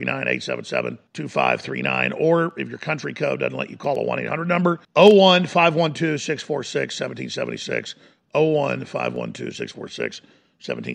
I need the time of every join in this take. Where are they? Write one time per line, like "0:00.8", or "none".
0:01.1
0:04.8